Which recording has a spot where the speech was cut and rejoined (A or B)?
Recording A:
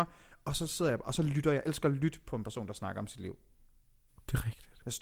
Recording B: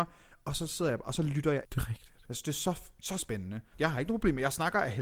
B